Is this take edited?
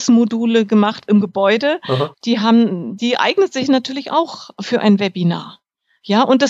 yes; 2 cuts; at 1.1 s, 2.1 s

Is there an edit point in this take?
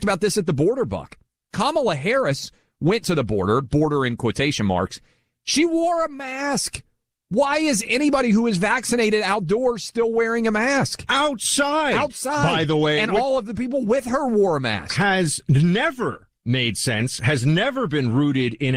no; 0 cuts

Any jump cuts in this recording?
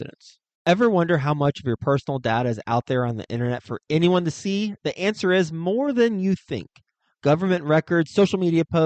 no; 0 cuts

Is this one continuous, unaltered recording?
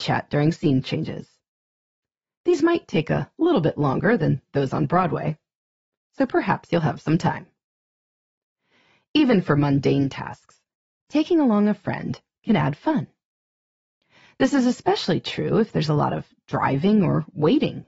yes; 0 cuts

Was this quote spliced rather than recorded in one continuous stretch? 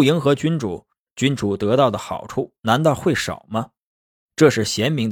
no; 0 cuts

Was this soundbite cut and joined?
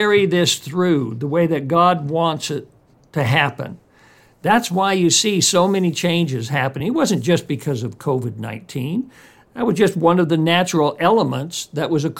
no; 0 cuts

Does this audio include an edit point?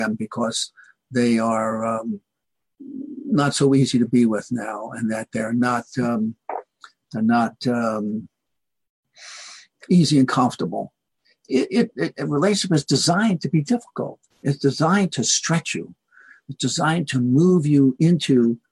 no; 0 cuts

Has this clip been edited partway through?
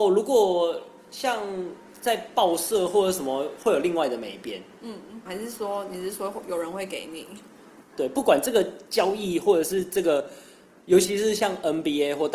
yes; 3 cuts; at 5.3 s, 7.9 s, 10.8 s

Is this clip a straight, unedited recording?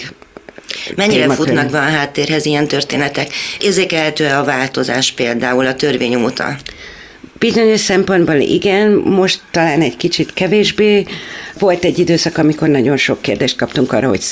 yes; 0 cuts

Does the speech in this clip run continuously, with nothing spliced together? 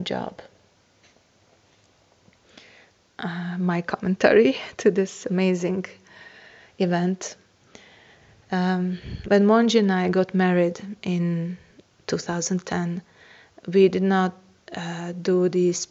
yes; 0 cuts

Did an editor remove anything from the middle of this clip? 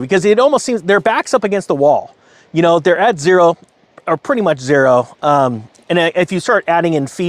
no; 0 cuts

